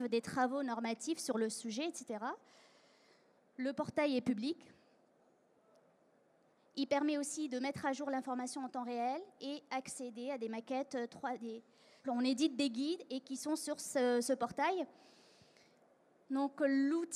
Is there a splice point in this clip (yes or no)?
yes